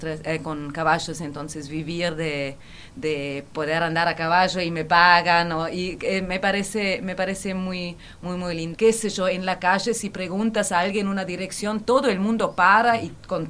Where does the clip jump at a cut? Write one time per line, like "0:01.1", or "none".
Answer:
0:08.7

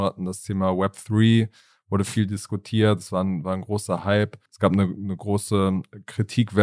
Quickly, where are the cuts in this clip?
0:04.5

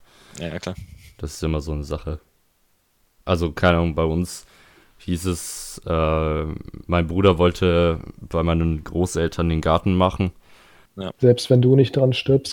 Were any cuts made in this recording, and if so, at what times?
0:10.9

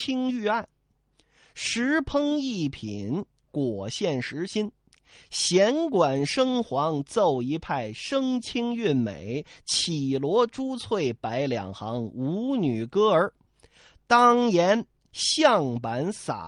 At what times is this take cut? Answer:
none

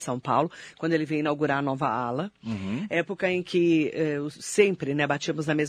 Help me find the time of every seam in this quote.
none

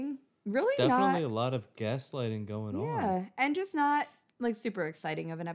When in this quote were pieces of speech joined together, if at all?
none

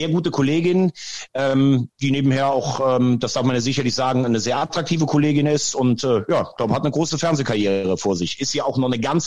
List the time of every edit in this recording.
none

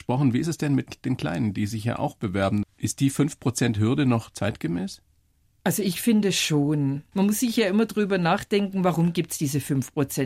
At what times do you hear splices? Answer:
0:02.6
0:07.1

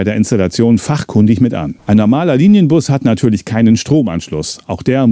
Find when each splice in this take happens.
0:01.8

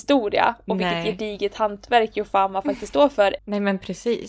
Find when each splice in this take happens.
0:03.4

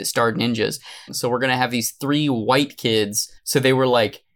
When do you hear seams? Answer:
0:01.1
0:03.4

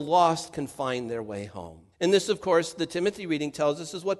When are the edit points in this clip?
0:01.9

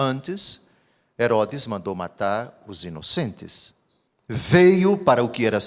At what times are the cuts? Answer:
0:04.1

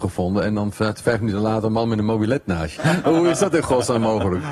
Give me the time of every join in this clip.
0:02.8

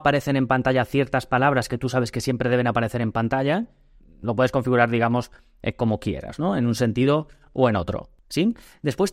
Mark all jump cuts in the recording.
0:04.0

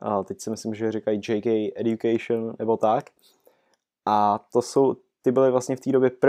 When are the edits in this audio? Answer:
none

